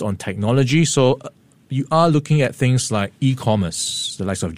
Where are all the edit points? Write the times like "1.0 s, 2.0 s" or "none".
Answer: none